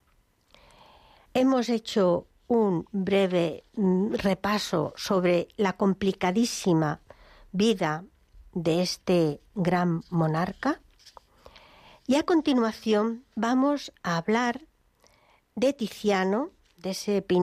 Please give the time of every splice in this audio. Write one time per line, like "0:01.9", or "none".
0:01.3
0:13.3